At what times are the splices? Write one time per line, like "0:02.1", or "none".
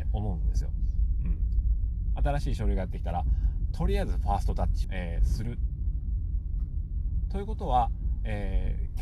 0:04.8